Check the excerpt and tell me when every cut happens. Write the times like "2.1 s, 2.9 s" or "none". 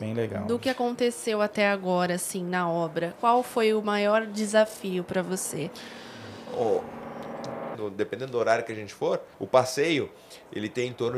3.2 s, 7.7 s, 9.3 s